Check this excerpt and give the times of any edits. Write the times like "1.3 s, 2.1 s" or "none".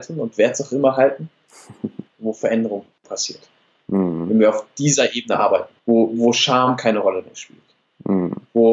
2.1 s, 5.8 s